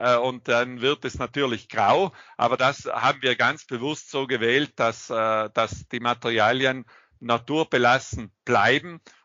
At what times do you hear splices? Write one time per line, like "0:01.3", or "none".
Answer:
none